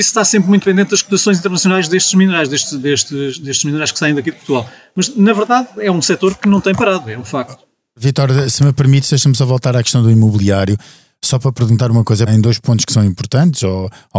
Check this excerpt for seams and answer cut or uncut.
cut